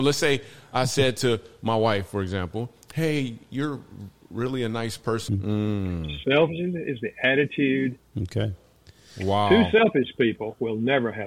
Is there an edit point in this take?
yes; 2 cuts; at 5.3 s, 8.1 s

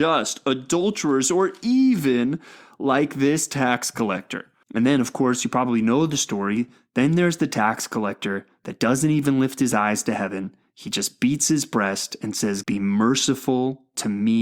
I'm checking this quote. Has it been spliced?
yes; 2 cuts; at 4.6 s, 12.6 s

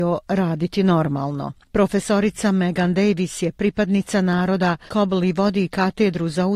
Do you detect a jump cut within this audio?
yes; 1 cut; at 4.9 s

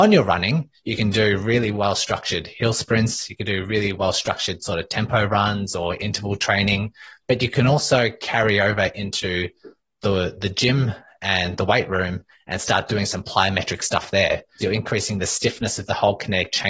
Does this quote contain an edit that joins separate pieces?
yes; 1 cut; at 14.6 s

